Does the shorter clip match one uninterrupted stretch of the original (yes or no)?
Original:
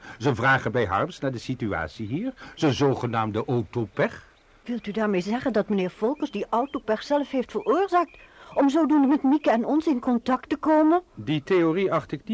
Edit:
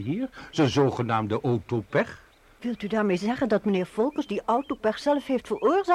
yes